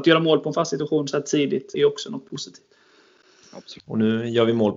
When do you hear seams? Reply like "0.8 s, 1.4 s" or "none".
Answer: 1.7 s, 3.8 s